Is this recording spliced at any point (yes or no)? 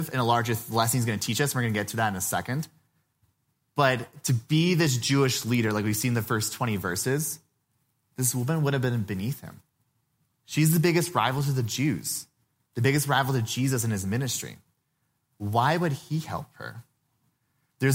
no